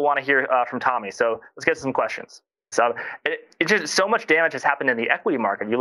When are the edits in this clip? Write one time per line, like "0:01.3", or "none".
0:02.7